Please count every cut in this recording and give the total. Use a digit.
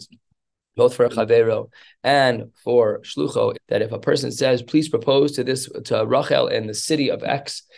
1